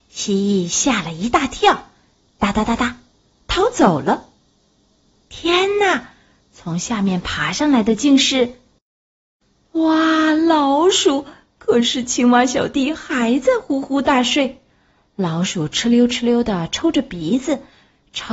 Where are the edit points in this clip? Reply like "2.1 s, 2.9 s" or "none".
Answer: none